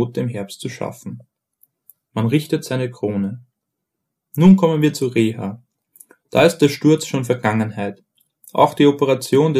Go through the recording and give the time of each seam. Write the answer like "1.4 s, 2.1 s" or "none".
none